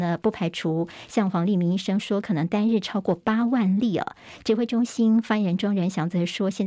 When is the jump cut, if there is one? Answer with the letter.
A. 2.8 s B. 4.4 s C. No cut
C